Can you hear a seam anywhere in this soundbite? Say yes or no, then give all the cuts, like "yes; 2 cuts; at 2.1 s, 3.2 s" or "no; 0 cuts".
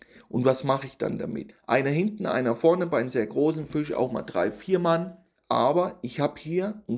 yes; 2 cuts; at 1.5 s, 5.4 s